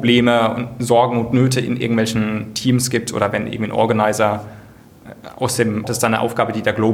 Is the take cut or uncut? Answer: cut